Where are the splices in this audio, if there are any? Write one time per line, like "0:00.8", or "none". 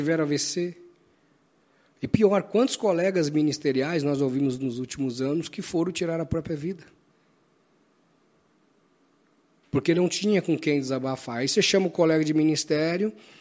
none